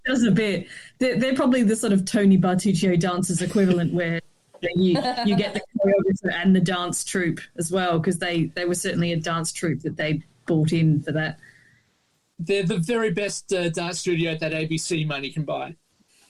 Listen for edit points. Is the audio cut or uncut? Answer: uncut